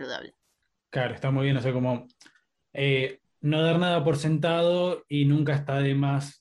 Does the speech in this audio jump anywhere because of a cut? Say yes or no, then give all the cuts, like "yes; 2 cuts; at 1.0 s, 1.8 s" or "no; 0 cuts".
no; 0 cuts